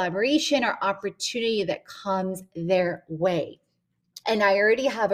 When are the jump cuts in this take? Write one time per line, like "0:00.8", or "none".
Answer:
0:04.2